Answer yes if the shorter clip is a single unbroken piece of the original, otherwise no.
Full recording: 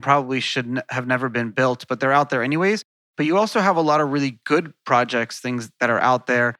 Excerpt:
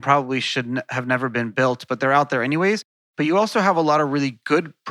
yes